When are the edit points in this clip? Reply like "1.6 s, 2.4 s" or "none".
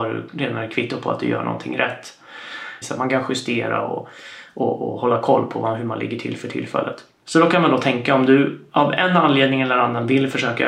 2.8 s